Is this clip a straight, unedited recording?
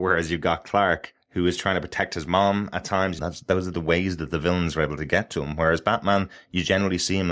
no; 1 cut; at 3.2 s

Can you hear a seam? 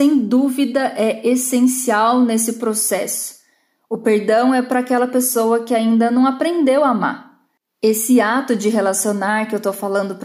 no; 0 cuts

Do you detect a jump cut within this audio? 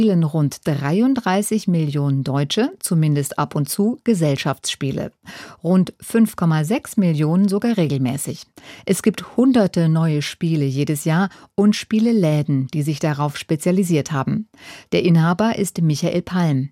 yes; 1 cut; at 14.9 s

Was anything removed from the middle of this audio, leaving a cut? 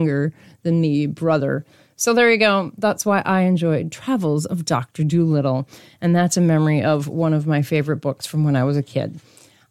no; 0 cuts

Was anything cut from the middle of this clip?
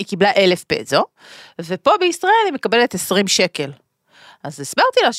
no; 0 cuts

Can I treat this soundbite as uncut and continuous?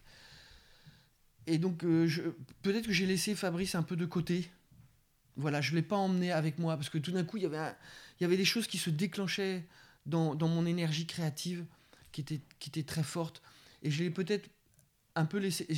yes; 0 cuts

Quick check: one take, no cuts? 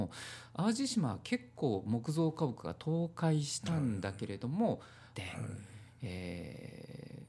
no; 1 cut; at 5.1 s

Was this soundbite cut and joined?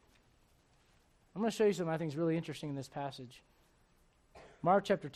yes; 1 cut; at 1.2 s

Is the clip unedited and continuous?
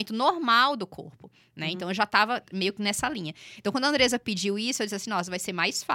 yes; 0 cuts

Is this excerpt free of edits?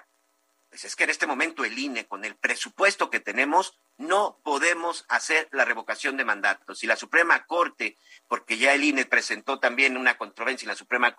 yes; 0 cuts

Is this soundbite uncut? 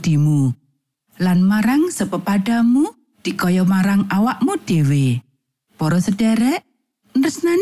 no; 1 cut; at 5.6 s

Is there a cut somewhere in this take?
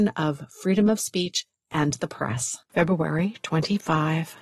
yes; 1 cut; at 2.6 s

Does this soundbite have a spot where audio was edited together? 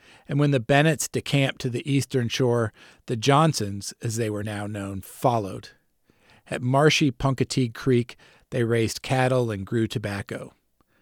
no; 0 cuts

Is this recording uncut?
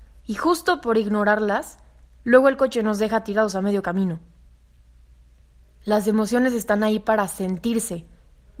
yes; 0 cuts

